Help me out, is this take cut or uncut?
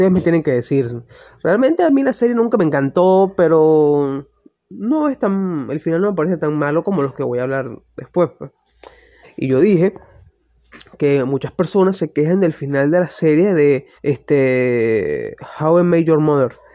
cut